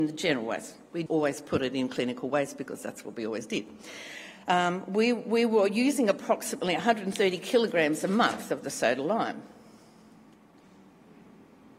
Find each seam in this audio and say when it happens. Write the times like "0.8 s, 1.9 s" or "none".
1.1 s